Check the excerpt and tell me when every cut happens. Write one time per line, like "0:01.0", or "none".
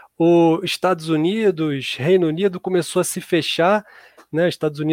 none